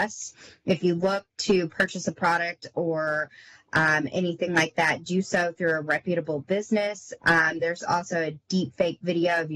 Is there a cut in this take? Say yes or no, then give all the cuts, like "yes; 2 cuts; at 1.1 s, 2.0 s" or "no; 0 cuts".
yes; 1 cut; at 7.2 s